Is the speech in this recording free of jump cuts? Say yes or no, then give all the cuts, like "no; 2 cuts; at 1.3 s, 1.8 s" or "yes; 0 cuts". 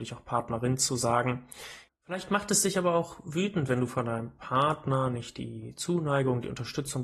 no; 1 cut; at 1.9 s